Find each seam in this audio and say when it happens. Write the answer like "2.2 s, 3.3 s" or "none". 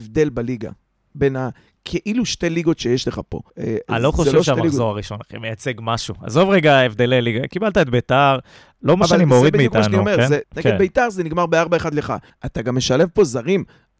3.5 s, 10.4 s, 12.3 s